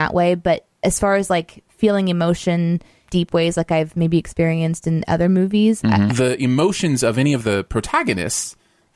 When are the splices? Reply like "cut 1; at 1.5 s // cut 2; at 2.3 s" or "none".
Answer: cut 1; at 3.1 s // cut 2; at 6.1 s